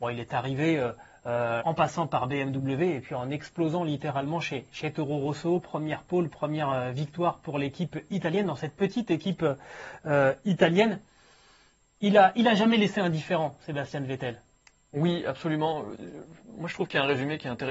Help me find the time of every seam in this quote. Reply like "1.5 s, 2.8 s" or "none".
1.6 s